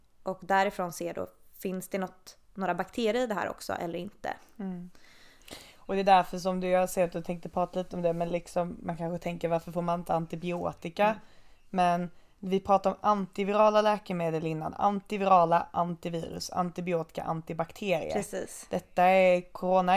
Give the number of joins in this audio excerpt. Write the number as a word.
zero